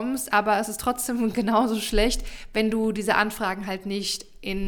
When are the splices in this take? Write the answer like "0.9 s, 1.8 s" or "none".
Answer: none